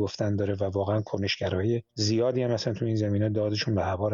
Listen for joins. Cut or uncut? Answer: cut